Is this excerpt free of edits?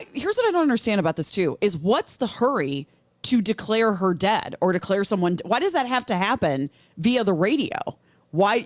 yes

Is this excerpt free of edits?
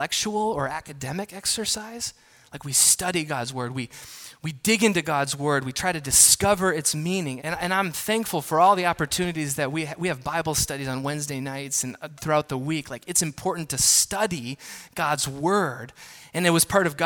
no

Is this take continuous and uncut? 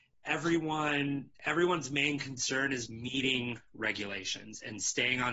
no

